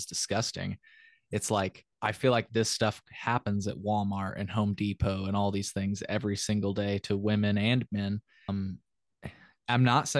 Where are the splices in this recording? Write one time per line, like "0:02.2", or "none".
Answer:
0:01.9
0:08.5